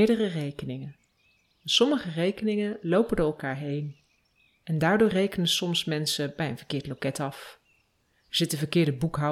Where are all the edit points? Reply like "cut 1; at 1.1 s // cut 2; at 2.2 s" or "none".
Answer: none